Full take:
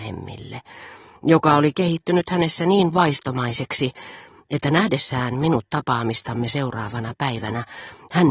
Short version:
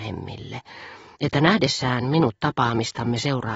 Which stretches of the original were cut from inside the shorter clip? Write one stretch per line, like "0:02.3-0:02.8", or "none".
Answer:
0:01.2-0:04.4